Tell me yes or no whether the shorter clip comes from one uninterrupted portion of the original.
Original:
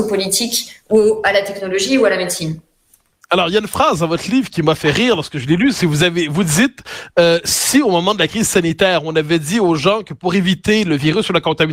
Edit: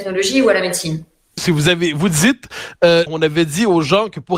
no